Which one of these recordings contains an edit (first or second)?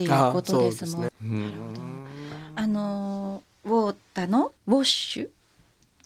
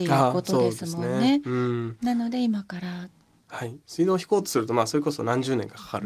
first